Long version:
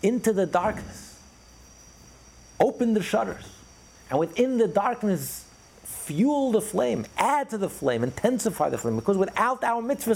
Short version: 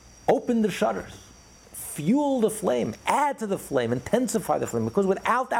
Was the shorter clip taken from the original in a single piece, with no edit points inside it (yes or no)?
no